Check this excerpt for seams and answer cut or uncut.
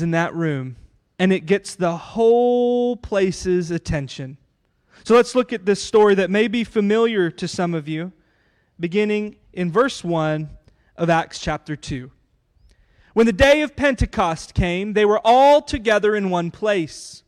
cut